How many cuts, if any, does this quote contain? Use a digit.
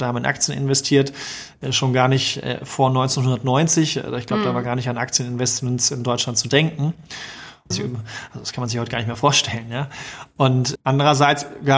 2